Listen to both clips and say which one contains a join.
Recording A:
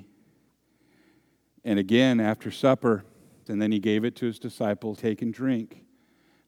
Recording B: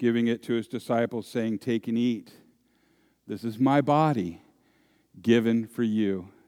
A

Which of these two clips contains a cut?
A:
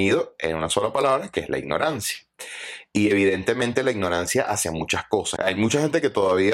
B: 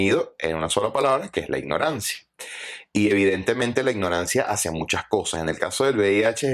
A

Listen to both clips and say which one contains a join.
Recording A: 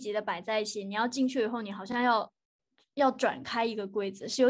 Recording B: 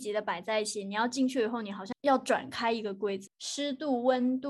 B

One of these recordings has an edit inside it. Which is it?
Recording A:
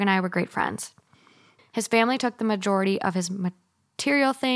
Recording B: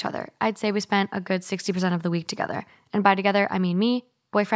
A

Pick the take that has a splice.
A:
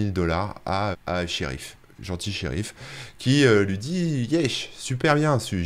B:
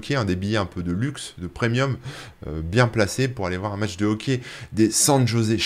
A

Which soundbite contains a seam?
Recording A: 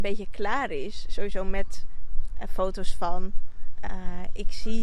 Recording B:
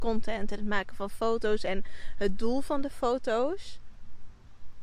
A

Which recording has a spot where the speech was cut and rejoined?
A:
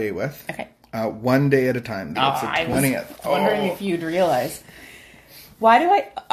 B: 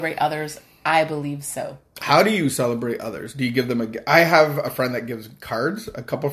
A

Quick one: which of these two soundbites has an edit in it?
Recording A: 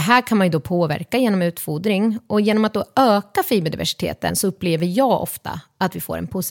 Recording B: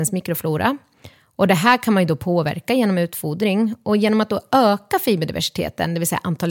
A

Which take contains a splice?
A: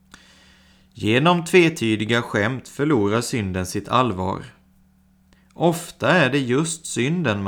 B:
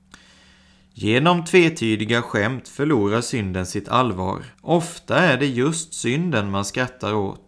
B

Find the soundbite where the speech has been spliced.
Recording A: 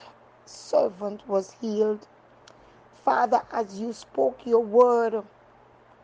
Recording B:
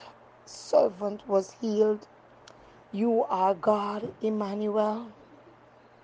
B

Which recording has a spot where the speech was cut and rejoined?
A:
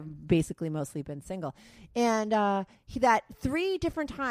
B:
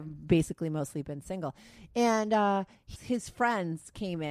B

